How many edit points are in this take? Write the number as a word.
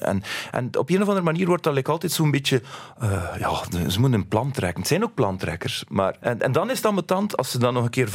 one